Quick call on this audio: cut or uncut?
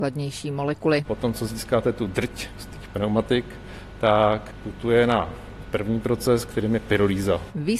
uncut